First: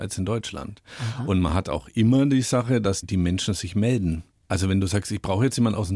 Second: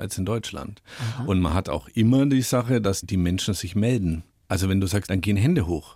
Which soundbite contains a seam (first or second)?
second